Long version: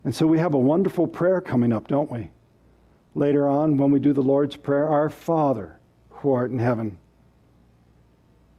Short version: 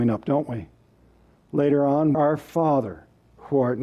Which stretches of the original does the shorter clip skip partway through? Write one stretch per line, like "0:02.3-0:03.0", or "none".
0:03.8-0:04.9